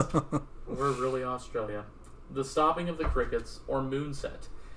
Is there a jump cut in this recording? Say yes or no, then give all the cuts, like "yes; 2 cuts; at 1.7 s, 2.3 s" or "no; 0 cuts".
no; 0 cuts